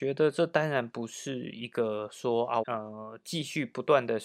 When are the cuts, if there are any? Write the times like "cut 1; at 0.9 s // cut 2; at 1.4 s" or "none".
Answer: cut 1; at 2.6 s